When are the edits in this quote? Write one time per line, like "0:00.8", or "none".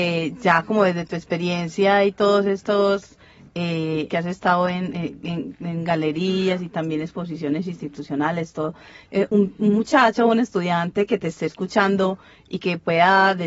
0:04.1
0:09.3